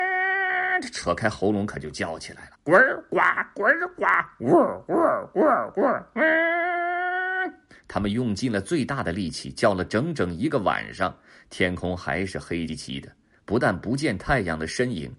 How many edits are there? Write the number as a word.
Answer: two